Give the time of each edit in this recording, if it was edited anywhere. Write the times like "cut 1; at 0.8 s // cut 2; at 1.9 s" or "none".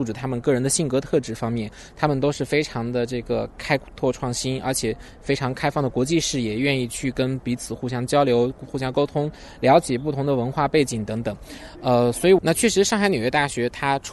cut 1; at 12.4 s

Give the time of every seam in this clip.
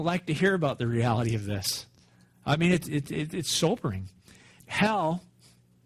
cut 1; at 4.6 s

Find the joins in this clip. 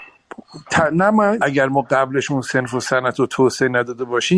cut 1; at 1.4 s

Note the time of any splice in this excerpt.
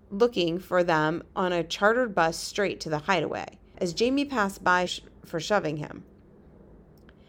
cut 1; at 3.7 s // cut 2; at 4.9 s

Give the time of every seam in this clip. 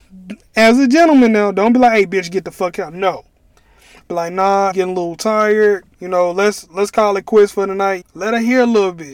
cut 1; at 4.7 s // cut 2; at 5.9 s // cut 3; at 8.0 s

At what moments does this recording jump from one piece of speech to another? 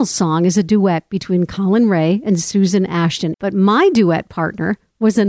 cut 1; at 3.3 s

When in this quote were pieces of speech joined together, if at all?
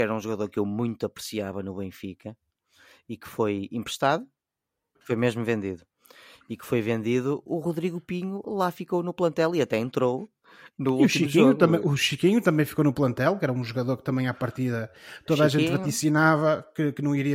cut 1; at 5.0 s

